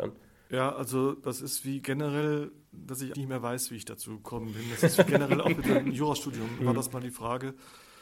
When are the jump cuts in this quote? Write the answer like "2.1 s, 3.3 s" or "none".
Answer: 3.1 s, 6.6 s